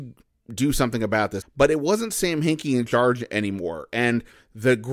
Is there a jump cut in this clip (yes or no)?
yes